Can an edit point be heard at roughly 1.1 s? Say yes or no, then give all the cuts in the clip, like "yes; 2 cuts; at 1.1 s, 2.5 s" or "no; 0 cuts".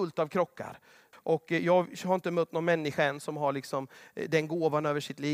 yes; 1 cut; at 1.1 s